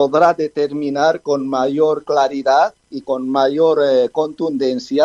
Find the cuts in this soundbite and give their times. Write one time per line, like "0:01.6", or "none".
0:03.0